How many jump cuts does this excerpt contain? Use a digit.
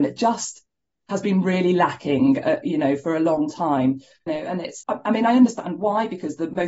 1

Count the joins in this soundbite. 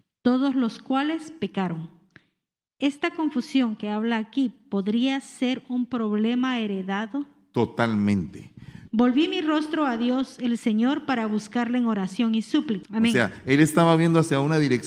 2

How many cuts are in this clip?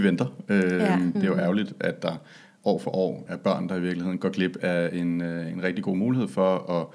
2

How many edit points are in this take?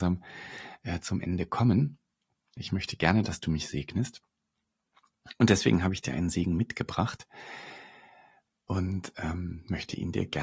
1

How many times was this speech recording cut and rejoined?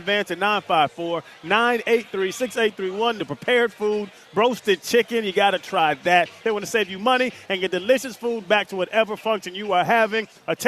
2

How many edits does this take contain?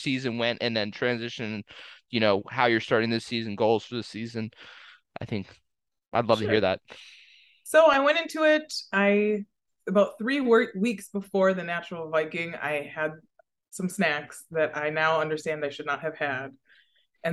0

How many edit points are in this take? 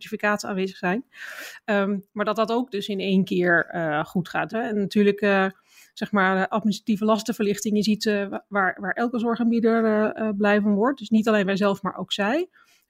1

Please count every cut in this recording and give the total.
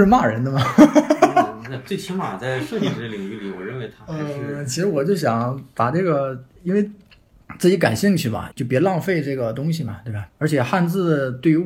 2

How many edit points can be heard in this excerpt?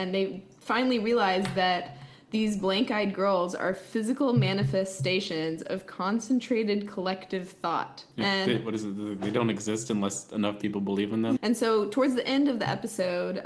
2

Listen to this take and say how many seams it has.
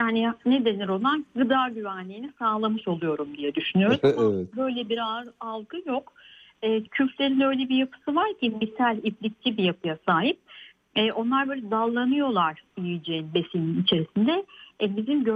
1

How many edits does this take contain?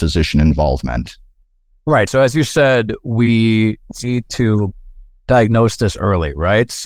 0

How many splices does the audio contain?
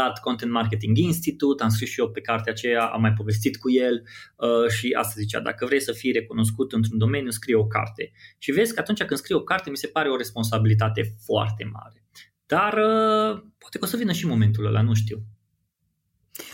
0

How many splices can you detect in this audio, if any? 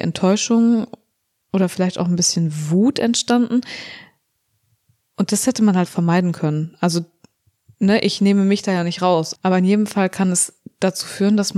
2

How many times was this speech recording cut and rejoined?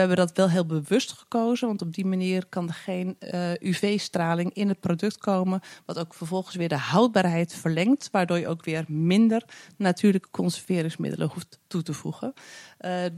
0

